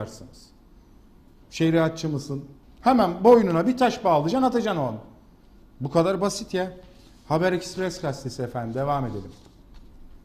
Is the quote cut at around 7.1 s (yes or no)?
no